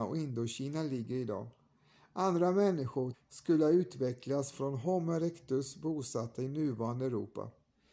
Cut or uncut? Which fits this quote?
cut